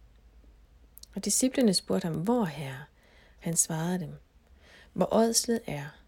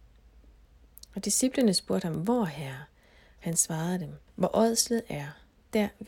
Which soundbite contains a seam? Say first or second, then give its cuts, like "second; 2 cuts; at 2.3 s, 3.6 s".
second; 1 cut; at 4.3 s